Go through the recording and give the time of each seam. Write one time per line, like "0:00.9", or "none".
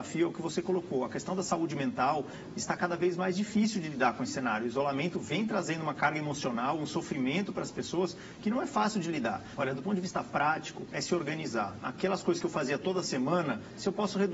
0:09.6
0:11.8